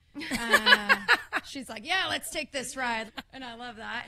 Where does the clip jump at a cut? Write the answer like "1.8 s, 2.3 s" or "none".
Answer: 3.1 s